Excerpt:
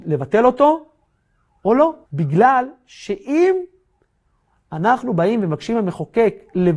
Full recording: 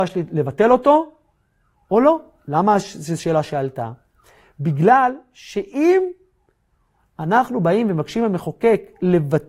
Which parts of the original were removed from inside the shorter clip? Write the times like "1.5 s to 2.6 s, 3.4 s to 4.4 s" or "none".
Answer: 2.3 s to 4.5 s